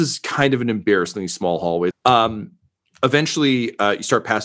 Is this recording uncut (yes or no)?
no